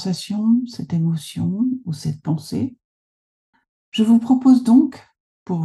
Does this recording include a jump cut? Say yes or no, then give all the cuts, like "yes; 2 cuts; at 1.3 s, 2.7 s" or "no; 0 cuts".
no; 0 cuts